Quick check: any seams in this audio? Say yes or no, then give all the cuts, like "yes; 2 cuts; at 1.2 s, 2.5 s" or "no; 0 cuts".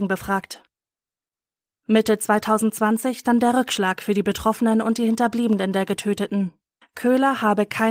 yes; 1 cut; at 6.8 s